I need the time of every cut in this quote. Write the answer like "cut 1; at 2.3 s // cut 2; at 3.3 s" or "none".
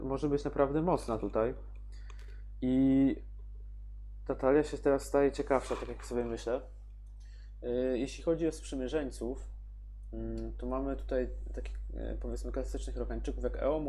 none